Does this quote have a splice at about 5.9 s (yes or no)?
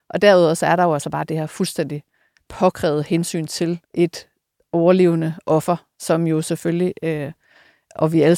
no